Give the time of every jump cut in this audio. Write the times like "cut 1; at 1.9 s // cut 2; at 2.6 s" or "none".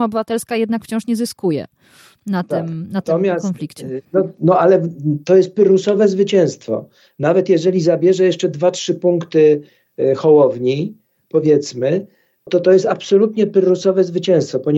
cut 1; at 12.5 s